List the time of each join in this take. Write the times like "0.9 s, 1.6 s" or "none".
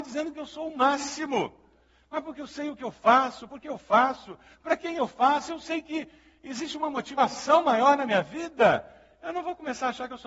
none